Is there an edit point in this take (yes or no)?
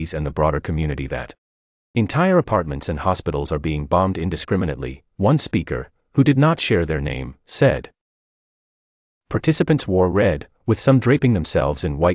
yes